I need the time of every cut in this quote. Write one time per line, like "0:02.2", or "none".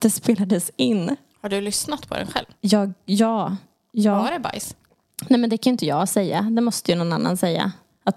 none